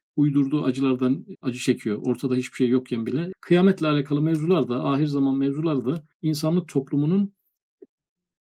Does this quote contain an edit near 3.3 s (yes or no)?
yes